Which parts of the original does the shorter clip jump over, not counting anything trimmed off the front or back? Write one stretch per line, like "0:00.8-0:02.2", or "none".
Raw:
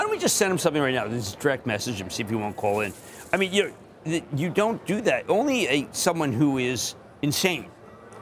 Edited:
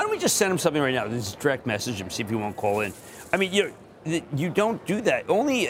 none